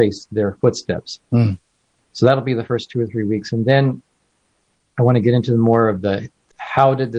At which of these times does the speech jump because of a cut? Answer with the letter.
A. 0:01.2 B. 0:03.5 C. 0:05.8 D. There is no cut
A